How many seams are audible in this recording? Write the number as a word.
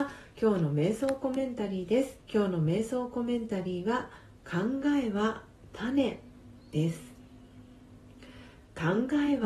one